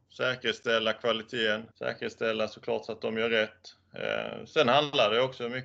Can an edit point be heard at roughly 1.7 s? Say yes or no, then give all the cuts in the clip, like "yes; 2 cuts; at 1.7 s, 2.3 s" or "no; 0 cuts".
yes; 1 cut; at 1.7 s